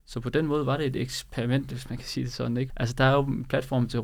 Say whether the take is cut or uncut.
cut